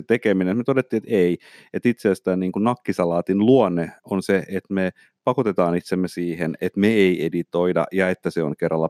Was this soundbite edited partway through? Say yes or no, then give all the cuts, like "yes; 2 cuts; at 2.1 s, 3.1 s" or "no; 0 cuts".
no; 0 cuts